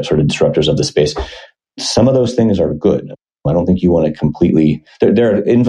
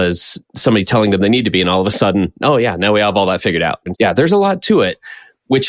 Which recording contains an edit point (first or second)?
second